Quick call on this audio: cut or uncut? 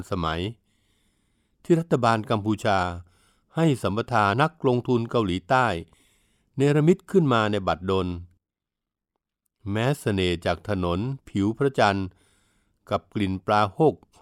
cut